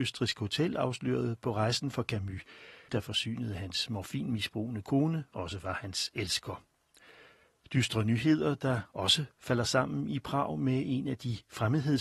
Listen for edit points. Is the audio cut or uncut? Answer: cut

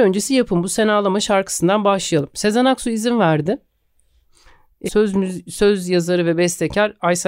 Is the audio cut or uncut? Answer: cut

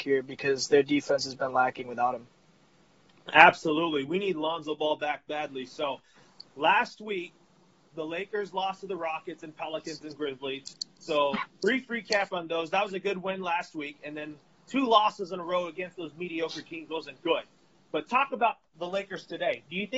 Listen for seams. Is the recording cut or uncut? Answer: uncut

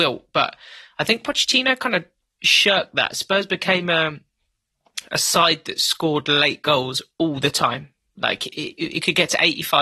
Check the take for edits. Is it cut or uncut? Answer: uncut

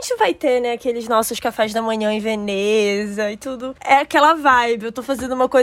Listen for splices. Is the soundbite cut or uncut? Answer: uncut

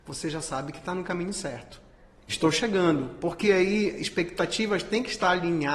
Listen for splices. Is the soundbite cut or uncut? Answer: cut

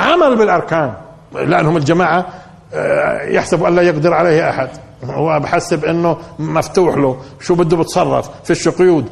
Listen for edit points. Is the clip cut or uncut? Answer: cut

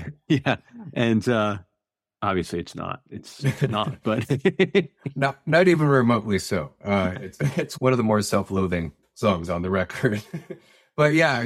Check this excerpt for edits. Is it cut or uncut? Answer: cut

